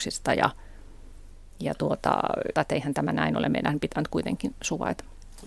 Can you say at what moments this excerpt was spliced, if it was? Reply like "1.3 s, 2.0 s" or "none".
2.5 s